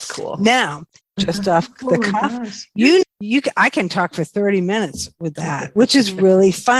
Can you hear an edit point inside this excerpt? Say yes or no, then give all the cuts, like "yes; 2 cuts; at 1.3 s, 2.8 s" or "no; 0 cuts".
yes; 3 cuts; at 1.0 s, 3.0 s, 5.4 s